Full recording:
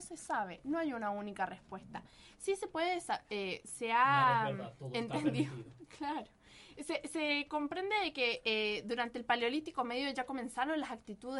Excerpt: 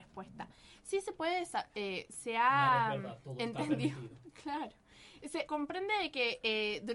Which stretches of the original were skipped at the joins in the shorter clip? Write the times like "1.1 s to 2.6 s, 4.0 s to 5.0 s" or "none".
7.0 s to 7.5 s